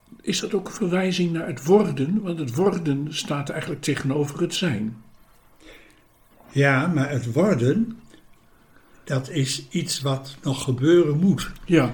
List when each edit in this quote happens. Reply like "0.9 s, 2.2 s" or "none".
none